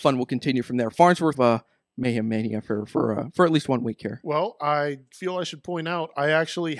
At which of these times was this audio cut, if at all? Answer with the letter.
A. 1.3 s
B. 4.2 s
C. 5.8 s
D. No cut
A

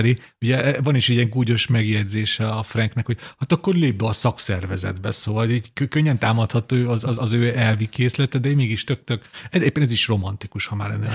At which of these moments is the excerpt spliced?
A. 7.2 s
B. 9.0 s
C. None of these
A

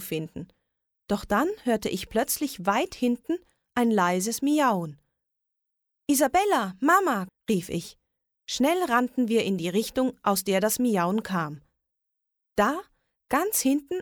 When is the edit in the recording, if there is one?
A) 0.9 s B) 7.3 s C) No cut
B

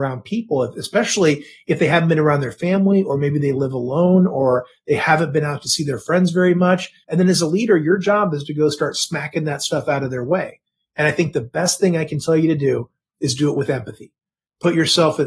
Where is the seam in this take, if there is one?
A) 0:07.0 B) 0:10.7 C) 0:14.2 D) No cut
A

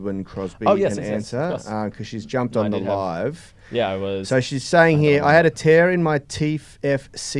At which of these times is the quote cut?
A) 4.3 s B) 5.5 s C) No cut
C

